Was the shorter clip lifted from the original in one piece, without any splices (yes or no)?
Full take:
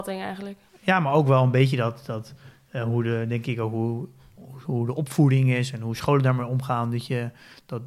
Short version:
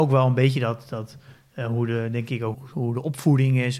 no